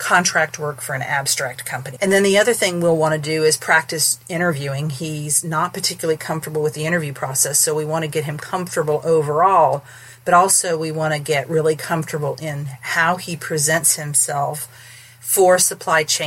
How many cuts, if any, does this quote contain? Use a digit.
1